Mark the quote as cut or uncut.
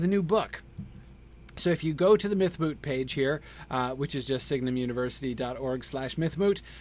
uncut